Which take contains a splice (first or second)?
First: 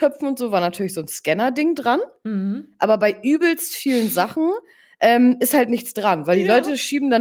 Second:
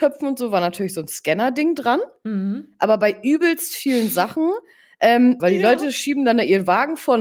second